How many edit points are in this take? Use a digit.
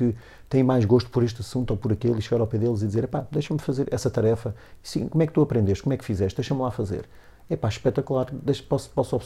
1